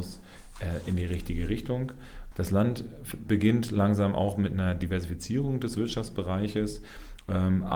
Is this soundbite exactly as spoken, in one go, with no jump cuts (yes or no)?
no